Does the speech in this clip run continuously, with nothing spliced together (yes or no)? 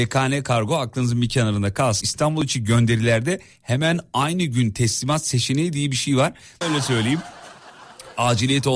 no